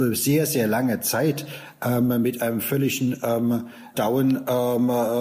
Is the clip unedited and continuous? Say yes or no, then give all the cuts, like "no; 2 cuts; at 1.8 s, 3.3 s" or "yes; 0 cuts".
no; 1 cut; at 3.9 s